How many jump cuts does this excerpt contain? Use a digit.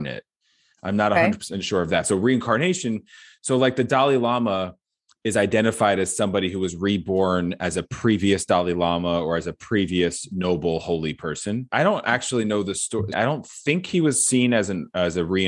2